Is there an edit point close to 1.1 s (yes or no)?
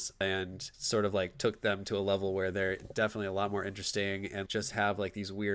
no